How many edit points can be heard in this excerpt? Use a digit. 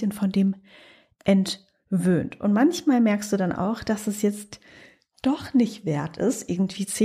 0